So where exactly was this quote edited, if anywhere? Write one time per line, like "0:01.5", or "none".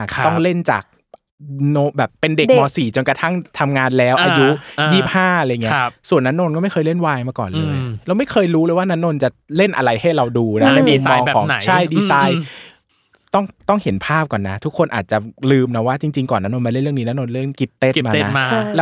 none